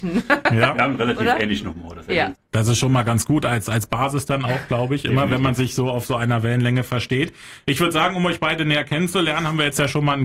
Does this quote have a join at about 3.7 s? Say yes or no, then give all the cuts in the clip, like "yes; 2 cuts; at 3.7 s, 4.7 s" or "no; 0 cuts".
no; 1 cut; at 2.3 s